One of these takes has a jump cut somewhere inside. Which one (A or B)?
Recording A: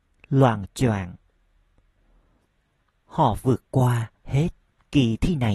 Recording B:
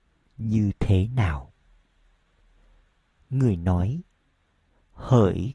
A